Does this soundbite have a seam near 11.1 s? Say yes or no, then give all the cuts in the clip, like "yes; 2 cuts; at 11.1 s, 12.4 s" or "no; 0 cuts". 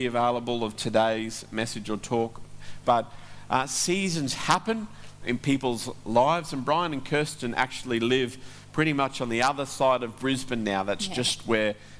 no; 1 cut; at 2.8 s